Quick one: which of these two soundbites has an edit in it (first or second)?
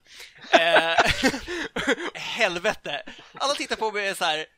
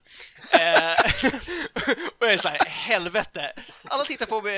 first